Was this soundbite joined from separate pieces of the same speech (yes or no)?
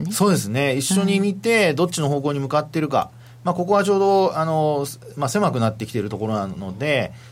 no